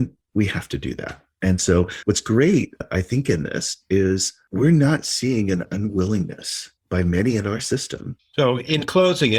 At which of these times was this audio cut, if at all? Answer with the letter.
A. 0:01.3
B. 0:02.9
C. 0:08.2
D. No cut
C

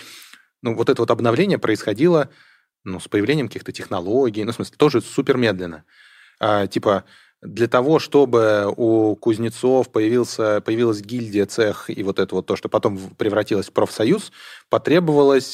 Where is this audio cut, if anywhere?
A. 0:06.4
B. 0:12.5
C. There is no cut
A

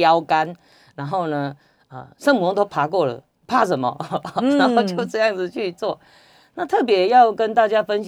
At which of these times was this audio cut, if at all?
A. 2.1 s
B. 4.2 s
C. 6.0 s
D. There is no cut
D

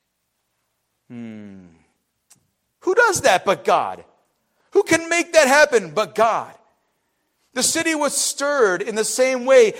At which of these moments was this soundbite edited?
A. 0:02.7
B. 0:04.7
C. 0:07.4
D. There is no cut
A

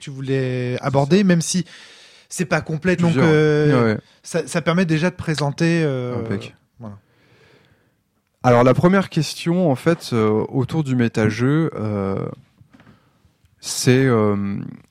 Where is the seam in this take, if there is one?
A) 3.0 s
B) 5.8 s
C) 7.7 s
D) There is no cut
A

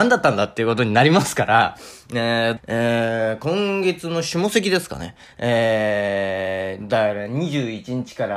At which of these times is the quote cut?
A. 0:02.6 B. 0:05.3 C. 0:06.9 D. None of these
A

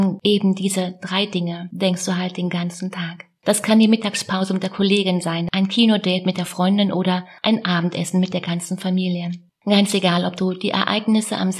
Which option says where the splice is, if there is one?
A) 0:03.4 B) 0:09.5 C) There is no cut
A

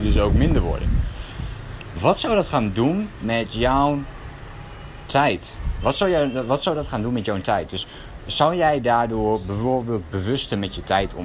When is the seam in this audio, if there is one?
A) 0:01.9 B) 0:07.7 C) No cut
C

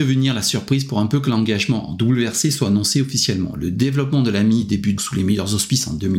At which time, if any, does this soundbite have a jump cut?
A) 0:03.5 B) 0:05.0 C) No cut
B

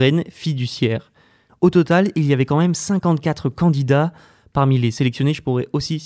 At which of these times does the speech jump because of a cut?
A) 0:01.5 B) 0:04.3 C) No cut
A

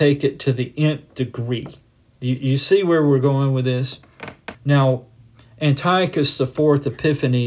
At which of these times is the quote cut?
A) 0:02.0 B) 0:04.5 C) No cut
B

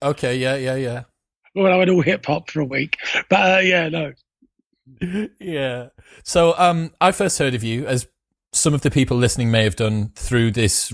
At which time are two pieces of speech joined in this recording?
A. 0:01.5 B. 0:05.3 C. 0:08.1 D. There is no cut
D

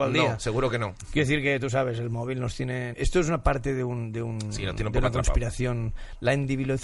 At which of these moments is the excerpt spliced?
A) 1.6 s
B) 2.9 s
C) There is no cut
B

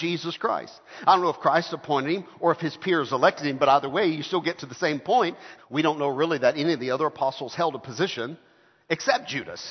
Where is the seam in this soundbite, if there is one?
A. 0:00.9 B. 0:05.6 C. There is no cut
B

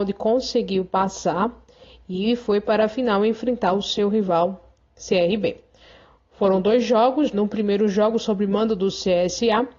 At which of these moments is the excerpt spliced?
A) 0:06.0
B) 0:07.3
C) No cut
B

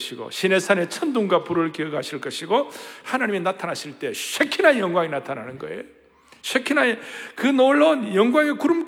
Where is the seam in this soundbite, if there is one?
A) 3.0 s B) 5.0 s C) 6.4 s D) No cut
A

